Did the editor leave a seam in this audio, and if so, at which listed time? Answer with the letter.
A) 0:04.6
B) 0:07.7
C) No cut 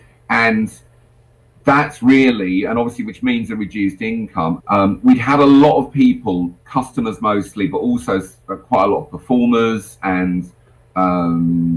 A